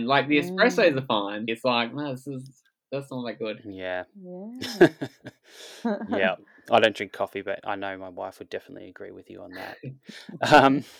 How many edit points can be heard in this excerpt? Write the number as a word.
one